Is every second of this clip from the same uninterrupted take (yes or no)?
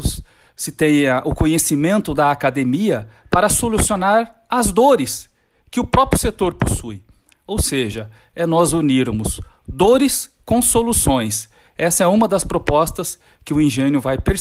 yes